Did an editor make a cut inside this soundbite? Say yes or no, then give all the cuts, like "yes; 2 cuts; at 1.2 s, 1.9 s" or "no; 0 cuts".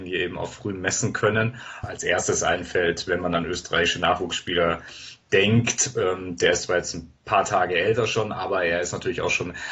yes; 1 cut; at 1.8 s